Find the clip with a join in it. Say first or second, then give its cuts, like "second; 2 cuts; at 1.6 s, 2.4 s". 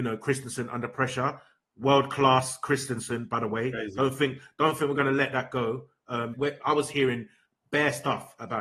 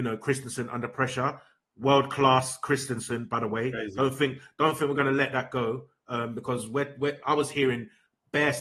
first; 1 cut; at 6.3 s